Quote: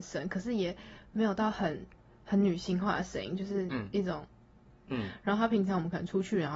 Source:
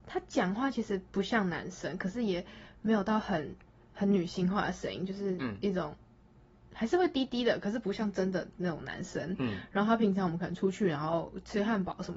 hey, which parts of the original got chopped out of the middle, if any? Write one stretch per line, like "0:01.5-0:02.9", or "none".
0:06.6-0:09.4